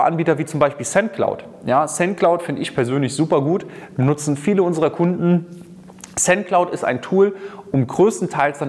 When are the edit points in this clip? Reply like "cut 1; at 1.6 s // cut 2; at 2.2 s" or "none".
none